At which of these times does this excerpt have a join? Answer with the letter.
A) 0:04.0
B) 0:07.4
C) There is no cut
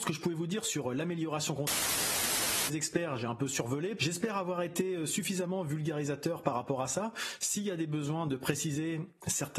A